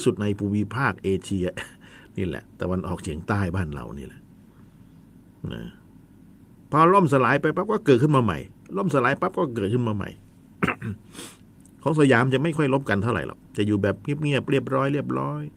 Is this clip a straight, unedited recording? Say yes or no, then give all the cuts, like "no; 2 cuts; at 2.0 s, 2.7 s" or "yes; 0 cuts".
no; 1 cut; at 13.5 s